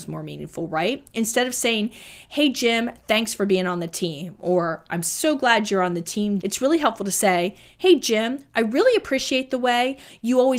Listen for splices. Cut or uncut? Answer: cut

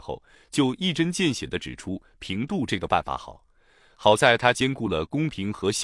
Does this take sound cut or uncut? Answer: uncut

